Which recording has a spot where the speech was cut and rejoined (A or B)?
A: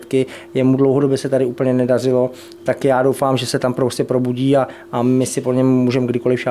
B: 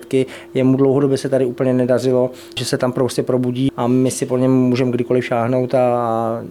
B